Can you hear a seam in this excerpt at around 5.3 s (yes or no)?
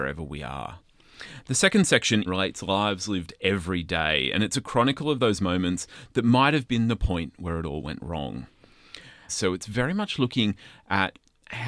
no